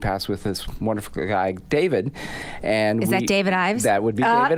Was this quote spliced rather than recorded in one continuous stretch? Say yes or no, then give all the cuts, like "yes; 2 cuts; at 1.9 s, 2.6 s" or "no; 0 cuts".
no; 0 cuts